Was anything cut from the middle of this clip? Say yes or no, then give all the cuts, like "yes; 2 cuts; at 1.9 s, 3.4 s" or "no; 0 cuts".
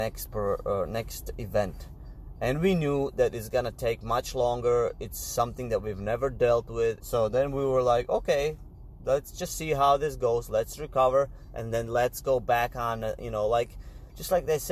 yes; 1 cut; at 7.0 s